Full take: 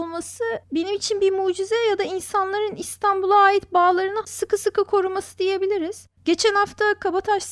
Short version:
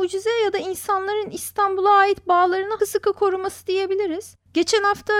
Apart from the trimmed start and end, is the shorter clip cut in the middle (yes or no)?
yes